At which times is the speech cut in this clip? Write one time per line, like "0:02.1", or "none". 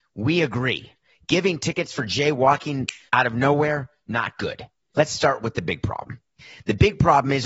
0:03.1
0:04.9